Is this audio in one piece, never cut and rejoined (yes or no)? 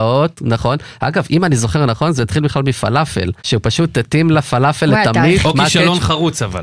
no